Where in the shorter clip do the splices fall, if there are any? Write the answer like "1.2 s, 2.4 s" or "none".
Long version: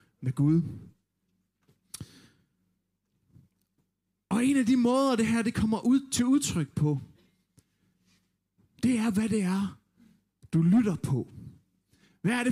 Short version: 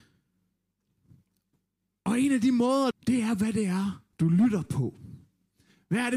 2.9 s, 4.1 s